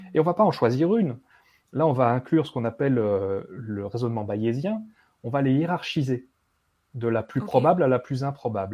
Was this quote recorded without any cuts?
yes; 0 cuts

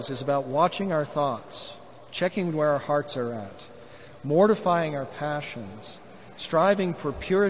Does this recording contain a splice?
no; 0 cuts

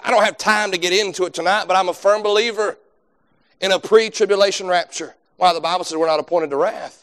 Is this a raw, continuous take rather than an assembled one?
no; 1 cut; at 5.2 s

